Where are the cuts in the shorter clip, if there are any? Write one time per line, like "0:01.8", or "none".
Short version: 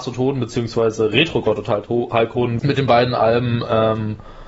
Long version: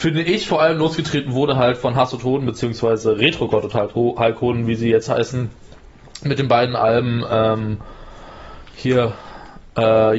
0:02.6